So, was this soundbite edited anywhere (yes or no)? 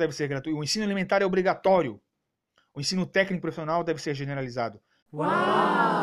yes